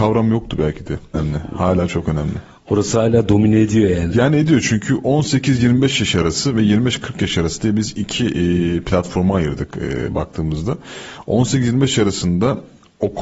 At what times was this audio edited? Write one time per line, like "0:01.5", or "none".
0:01.1

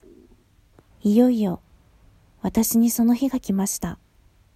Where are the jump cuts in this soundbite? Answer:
0:00.9

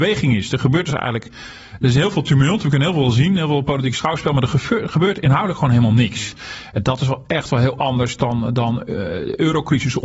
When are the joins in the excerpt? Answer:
none

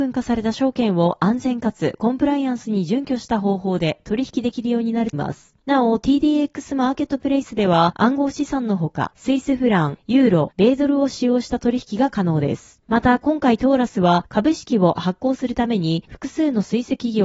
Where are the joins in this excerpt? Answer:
0:05.1

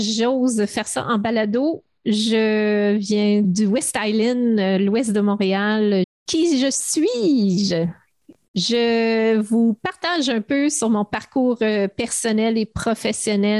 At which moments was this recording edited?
0:03.4
0:06.0

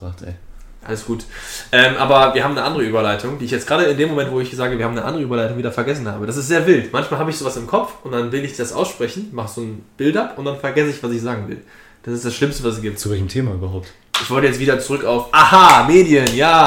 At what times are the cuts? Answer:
none

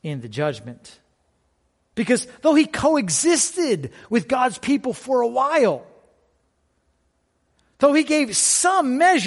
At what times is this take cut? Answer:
0:01.9

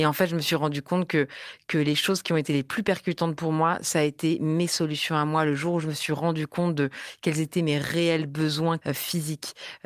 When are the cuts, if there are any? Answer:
none

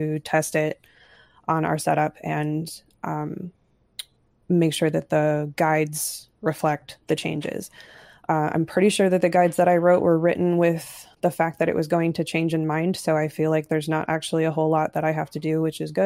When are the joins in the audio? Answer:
none

